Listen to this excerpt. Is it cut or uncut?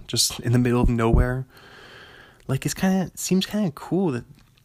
uncut